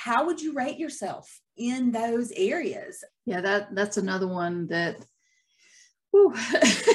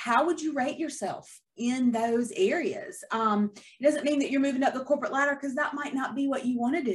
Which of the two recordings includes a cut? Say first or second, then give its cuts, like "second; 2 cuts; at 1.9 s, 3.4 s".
first; 1 cut; at 3.1 s